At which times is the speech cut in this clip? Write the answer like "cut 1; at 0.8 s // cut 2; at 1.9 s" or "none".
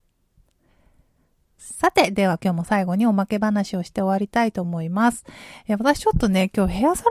none